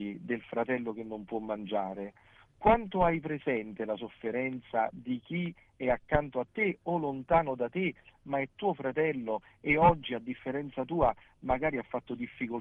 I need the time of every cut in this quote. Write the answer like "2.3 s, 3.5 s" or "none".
none